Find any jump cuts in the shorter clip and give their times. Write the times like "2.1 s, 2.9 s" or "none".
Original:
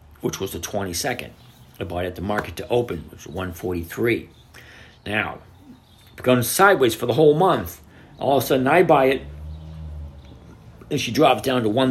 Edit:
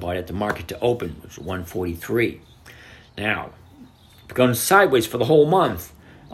none